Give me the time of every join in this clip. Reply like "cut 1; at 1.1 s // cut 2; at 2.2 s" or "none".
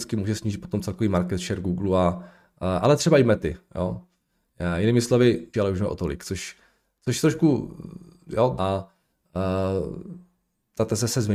cut 1; at 5.5 s // cut 2; at 8.6 s